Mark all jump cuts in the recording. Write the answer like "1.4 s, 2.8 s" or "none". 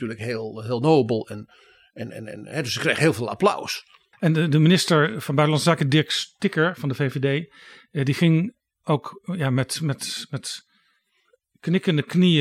4.1 s